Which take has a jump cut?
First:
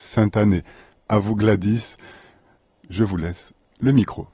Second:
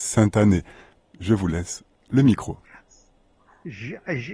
second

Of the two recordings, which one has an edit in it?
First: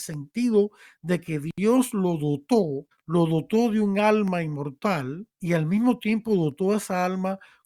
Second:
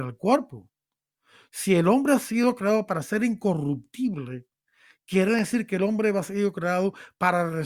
first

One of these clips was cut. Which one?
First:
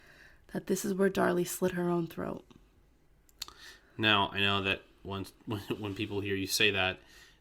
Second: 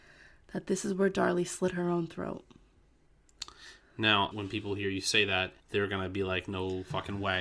second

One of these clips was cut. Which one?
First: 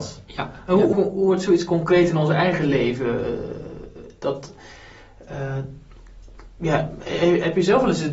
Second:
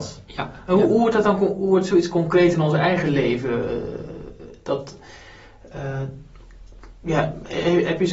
first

